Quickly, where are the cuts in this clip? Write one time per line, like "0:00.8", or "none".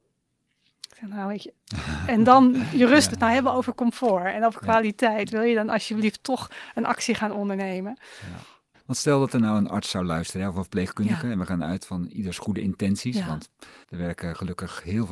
0:03.1
0:08.7
0:13.8